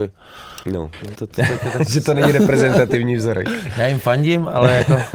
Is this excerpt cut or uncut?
cut